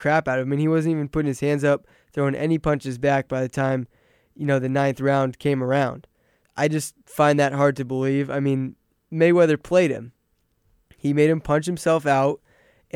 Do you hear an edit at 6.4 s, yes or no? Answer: yes